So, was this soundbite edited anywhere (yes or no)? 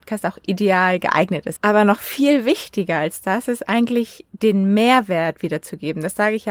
yes